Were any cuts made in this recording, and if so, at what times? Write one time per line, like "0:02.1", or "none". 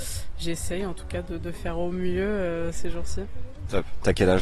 none